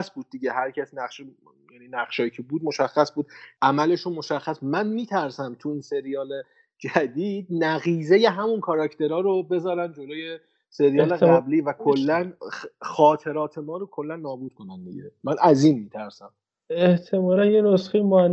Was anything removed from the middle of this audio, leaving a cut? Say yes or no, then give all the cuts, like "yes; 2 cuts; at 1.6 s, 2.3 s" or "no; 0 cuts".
no; 0 cuts